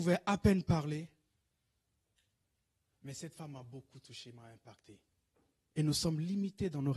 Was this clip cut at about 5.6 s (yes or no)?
yes